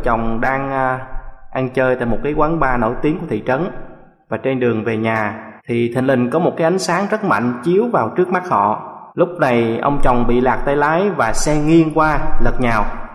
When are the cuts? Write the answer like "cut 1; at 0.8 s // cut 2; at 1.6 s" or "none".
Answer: cut 1; at 5.6 s // cut 2; at 9.1 s